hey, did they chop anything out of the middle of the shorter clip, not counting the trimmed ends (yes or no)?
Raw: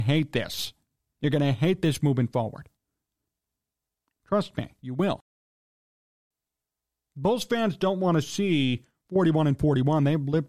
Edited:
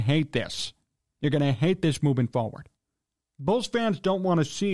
yes